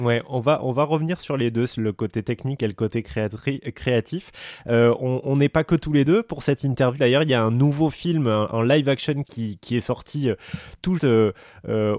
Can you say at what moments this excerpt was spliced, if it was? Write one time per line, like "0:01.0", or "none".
0:07.0
0:11.0